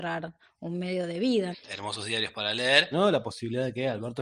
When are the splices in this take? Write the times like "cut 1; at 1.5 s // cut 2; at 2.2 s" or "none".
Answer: cut 1; at 1.5 s // cut 2; at 2.9 s